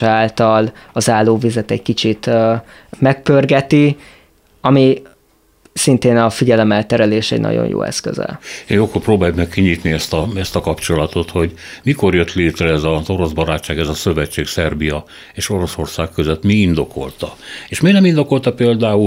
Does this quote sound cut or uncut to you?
cut